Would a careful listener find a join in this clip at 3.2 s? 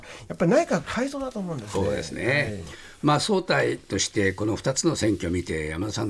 no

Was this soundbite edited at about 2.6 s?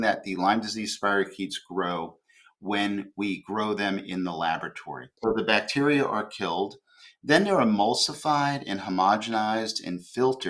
no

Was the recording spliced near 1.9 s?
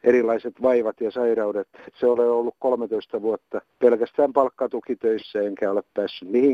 yes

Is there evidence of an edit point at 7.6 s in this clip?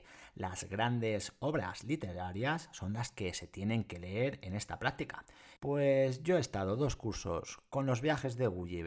no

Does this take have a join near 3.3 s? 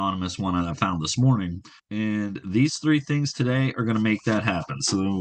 no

